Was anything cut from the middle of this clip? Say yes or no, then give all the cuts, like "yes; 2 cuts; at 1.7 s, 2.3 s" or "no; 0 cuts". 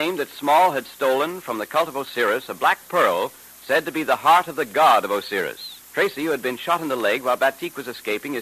yes; 1 cut; at 5.8 s